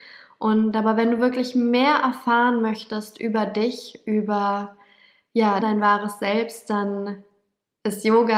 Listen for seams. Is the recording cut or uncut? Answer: cut